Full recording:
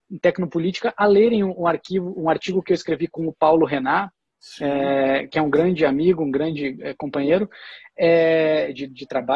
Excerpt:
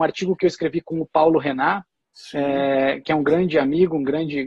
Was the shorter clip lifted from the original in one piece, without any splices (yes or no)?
yes